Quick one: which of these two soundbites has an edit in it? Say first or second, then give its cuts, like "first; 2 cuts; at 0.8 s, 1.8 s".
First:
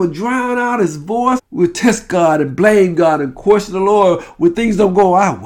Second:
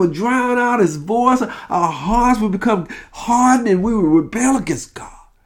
first; 1 cut; at 1.4 s